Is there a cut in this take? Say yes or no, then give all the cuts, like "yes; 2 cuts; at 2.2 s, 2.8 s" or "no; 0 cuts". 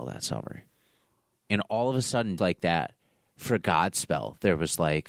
yes; 1 cut; at 2.4 s